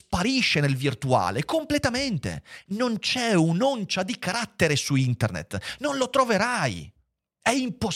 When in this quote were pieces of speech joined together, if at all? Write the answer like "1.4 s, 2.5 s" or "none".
none

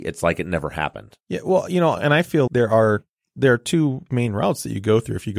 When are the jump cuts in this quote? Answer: 1.2 s, 2.5 s

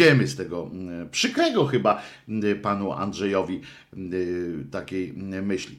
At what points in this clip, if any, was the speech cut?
none

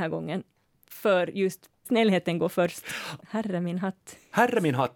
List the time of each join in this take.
1.8 s, 3.2 s

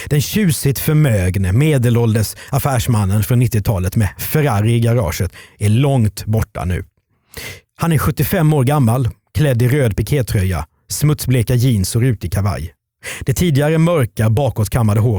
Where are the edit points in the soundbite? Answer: none

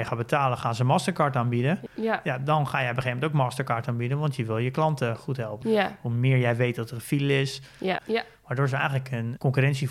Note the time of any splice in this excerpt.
1.9 s, 5.6 s, 8.0 s

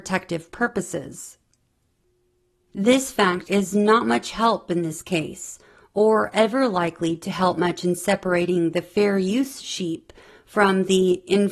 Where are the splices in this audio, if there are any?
3.4 s

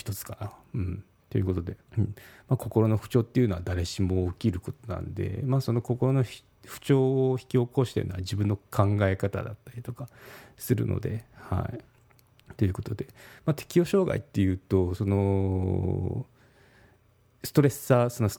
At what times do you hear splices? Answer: 1.9 s

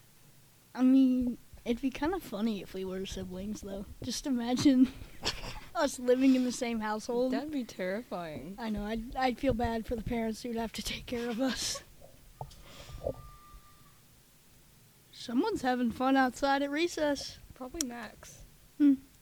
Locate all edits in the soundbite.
none

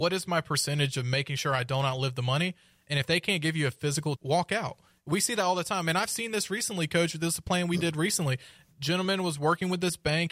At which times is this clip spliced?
4.2 s

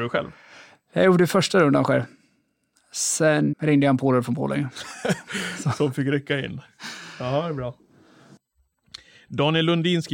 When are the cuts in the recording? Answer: 3.5 s

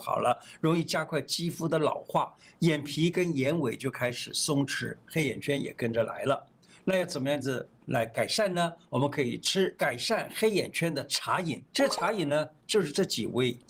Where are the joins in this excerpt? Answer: none

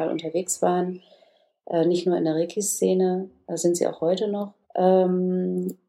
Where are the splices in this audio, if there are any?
4.6 s

